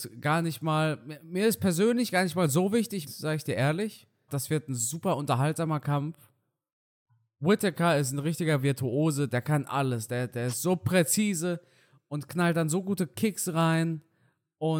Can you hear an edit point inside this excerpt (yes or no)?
yes